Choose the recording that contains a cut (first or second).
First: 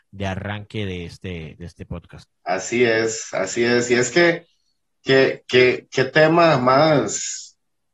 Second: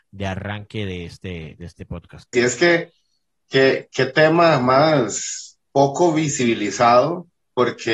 second